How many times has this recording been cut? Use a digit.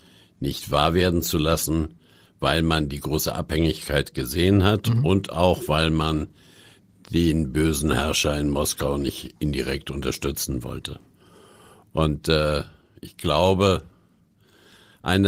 0